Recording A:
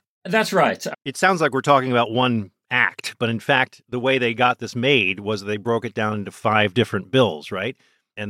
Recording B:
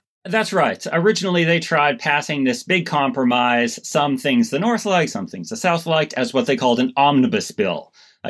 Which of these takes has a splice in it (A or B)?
A